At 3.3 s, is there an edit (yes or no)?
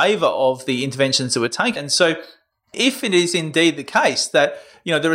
no